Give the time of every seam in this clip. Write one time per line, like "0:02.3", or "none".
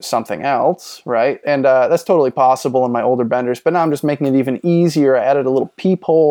0:01.4